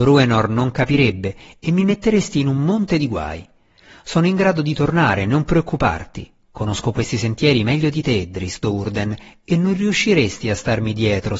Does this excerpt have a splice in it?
no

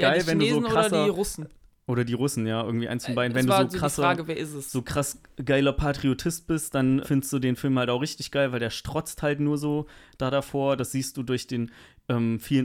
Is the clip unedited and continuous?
no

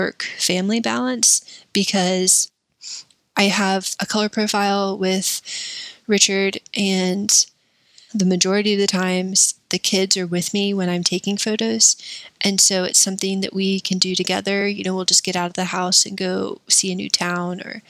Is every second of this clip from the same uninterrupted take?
yes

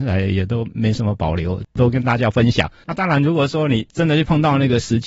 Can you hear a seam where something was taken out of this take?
no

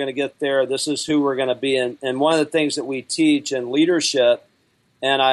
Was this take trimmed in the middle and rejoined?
no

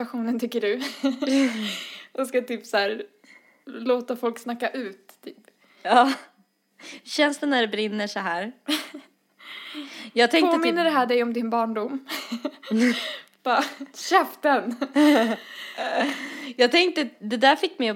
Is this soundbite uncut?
yes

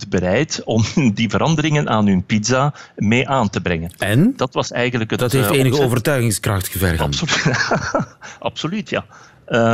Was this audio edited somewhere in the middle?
yes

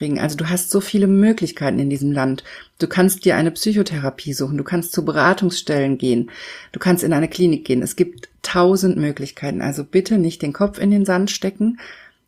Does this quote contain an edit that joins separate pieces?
no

